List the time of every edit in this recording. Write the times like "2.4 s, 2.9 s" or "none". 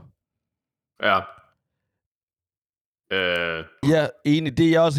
3.8 s